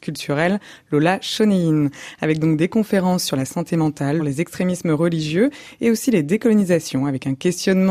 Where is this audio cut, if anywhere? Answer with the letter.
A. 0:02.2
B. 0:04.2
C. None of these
B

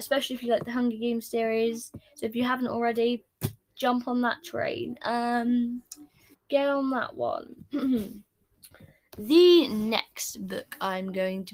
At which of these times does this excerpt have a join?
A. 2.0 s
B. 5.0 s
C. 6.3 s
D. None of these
C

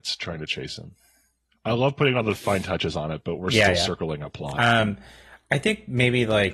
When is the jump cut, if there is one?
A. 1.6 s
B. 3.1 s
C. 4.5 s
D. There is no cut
D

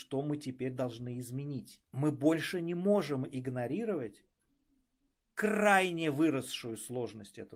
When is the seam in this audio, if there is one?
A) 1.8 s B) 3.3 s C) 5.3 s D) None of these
A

